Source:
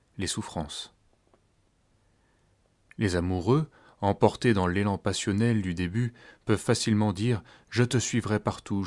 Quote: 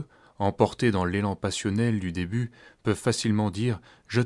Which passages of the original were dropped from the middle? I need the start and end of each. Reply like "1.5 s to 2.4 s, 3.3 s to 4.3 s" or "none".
none